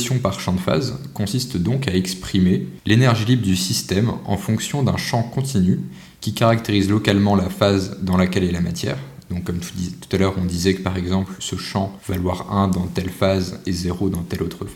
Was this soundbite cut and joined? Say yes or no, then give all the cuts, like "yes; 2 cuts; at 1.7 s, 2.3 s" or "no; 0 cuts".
no; 0 cuts